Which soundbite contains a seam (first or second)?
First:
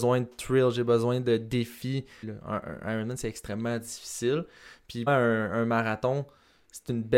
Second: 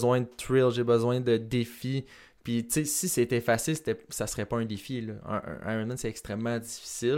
first